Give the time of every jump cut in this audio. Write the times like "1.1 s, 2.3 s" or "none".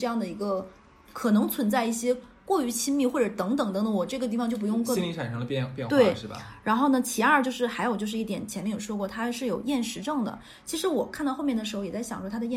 none